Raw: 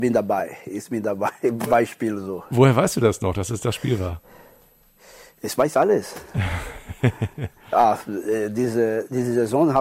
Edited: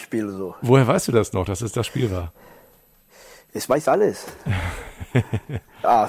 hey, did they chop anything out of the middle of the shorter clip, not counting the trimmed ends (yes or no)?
no